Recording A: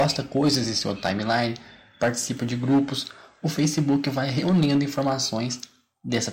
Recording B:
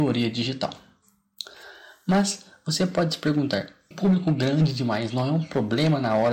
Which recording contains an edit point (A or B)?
B